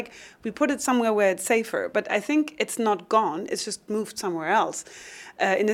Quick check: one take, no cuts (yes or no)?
yes